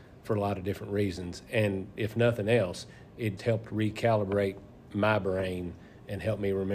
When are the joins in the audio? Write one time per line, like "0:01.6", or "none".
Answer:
0:03.4